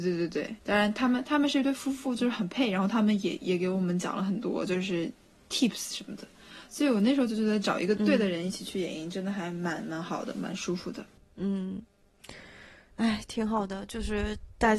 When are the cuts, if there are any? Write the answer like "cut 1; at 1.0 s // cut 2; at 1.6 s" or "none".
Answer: none